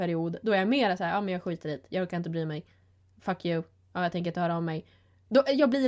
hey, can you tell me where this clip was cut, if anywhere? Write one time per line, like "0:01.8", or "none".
none

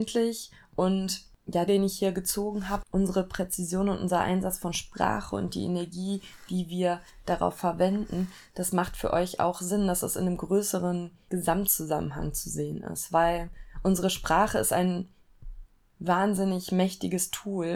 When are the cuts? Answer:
0:01.7
0:02.8

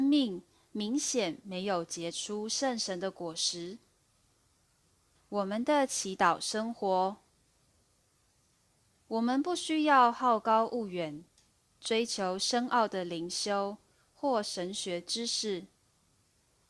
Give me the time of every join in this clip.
0:05.1

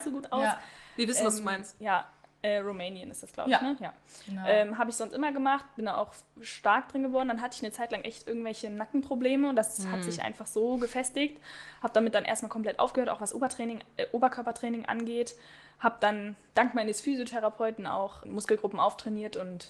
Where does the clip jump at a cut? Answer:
0:18.2

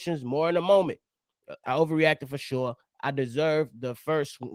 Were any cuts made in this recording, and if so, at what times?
0:01.6

